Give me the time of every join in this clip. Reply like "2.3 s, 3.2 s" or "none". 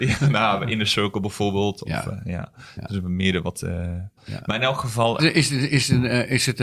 4.2 s, 5.2 s

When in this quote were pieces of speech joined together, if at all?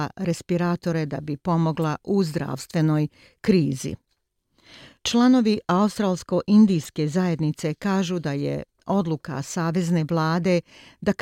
none

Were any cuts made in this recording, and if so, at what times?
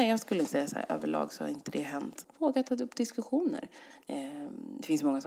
2.2 s, 4.0 s

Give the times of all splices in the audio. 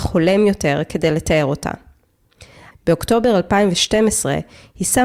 2.7 s

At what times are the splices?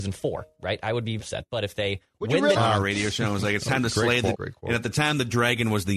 1.2 s, 2.6 s, 4.3 s

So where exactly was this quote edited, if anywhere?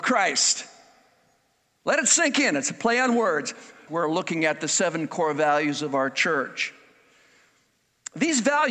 3.9 s

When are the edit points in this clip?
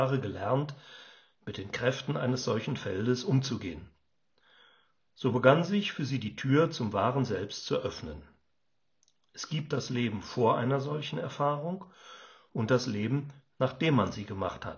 none

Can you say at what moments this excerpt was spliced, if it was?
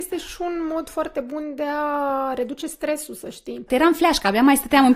3.7 s

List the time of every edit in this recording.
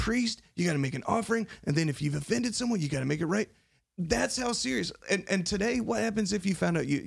none

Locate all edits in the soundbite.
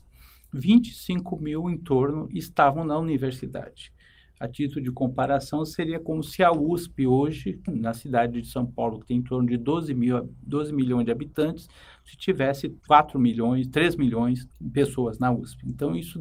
7.7 s, 12.8 s, 14.5 s

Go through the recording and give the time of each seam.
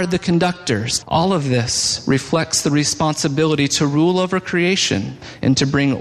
1.0 s

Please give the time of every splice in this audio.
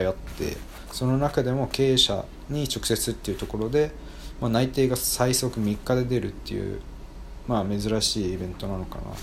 none

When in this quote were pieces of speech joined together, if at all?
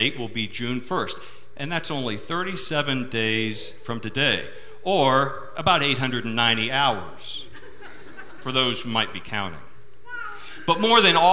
none

